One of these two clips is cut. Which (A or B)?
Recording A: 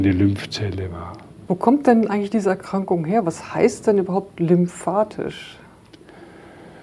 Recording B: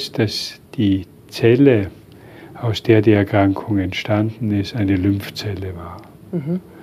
A